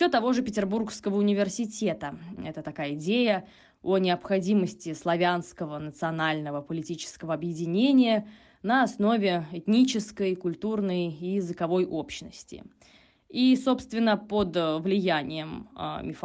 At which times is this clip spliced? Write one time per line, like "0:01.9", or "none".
0:02.4